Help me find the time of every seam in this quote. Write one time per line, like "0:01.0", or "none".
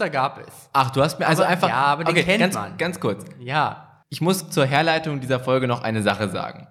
0:04.0